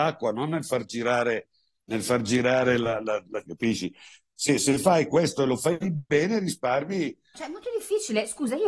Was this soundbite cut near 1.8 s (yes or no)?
no